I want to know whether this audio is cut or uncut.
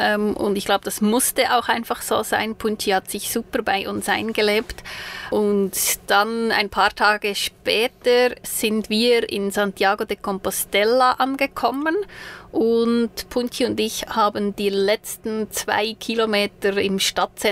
uncut